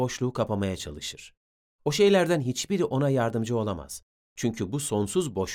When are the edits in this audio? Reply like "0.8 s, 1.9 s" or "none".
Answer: none